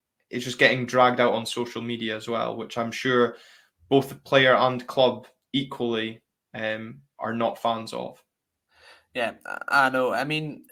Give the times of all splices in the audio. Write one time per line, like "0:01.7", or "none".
none

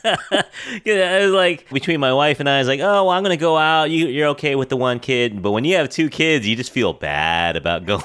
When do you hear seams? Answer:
0:01.7

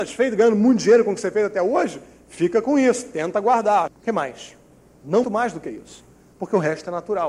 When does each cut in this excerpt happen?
0:03.9
0:05.2

